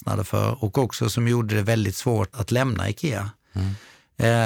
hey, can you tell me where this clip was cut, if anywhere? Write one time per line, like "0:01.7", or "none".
0:02.3